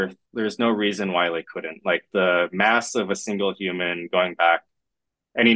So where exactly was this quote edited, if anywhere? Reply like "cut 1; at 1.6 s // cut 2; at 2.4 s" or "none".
none